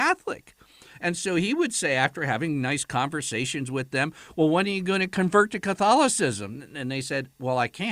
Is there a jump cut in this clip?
no; 0 cuts

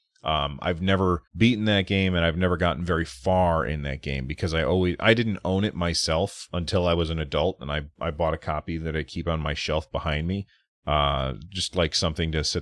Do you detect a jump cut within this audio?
yes; 1 cut; at 1.3 s

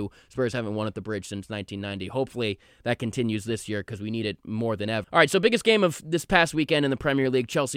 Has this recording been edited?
yes; 1 cut; at 5.0 s

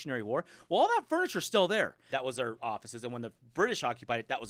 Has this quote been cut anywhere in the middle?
yes; 1 cut; at 2.1 s

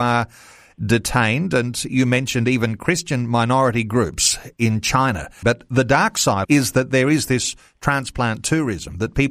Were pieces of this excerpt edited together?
yes; 2 cuts; at 5.4 s, 6.4 s

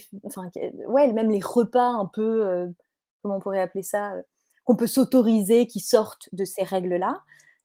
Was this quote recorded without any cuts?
yes; 0 cuts

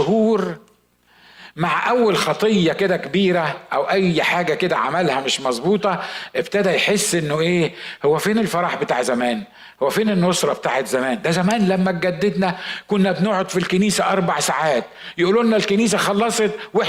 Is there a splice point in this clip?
yes; 1 cut; at 9.7 s

